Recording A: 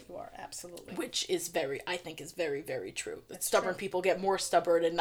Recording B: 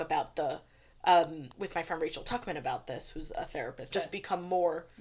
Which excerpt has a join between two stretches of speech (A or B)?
B